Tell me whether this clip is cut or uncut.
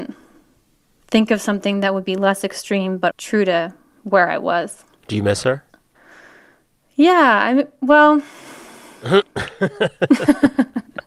cut